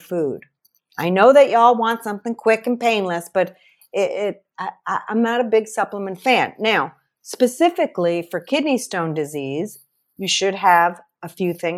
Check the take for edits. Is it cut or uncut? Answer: uncut